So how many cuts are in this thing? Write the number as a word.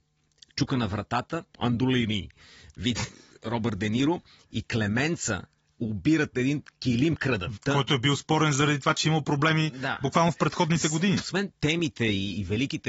three